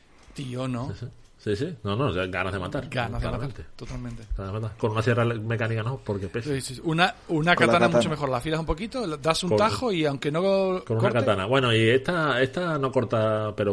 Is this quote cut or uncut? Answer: uncut